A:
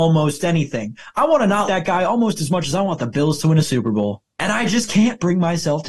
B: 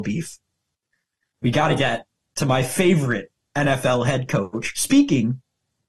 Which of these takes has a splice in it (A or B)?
A